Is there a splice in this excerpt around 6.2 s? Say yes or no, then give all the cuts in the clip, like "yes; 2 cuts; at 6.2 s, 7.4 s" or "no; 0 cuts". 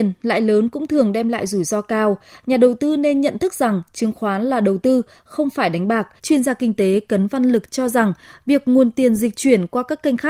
yes; 1 cut; at 6.2 s